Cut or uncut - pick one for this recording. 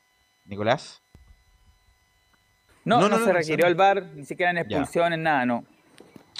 uncut